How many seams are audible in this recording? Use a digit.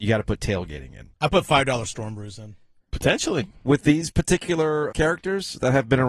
3